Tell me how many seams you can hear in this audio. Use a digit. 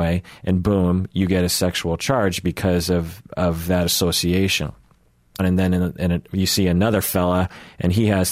1